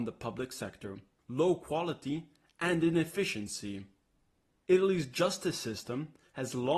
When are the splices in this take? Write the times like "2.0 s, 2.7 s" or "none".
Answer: 1.2 s, 4.6 s